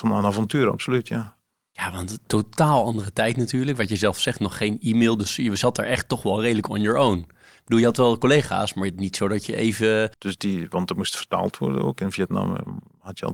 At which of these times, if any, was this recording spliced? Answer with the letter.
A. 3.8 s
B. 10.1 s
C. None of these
B